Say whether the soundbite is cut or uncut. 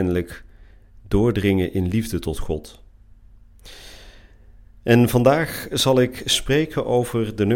uncut